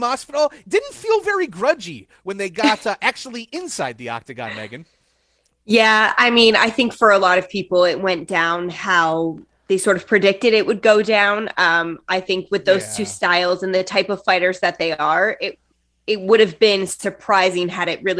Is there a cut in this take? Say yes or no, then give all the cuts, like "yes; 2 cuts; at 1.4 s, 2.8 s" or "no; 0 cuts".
no; 0 cuts